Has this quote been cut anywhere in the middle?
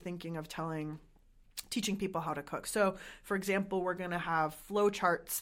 no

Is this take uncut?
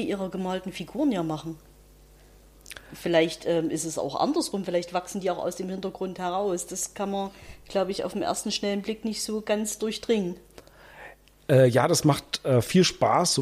yes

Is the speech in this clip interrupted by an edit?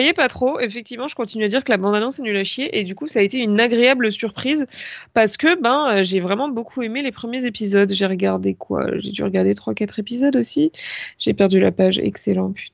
no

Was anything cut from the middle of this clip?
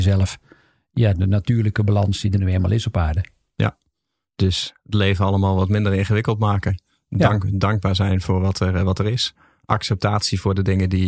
yes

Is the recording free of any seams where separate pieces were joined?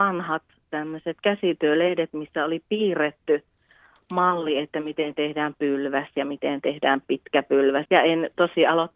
no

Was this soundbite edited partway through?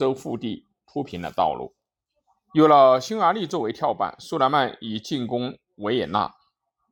yes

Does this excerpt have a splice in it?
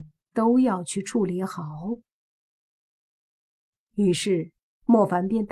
no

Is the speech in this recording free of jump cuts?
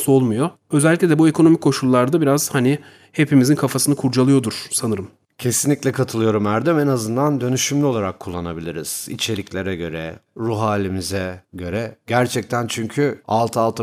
no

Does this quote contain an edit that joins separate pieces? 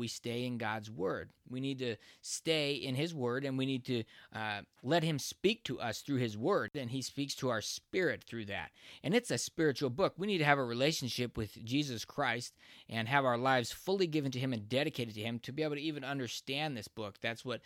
yes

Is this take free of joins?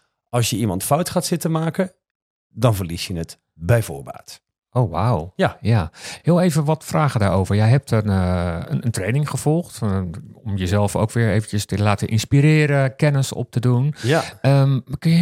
yes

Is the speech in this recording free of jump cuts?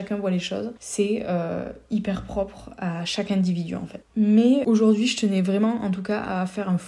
yes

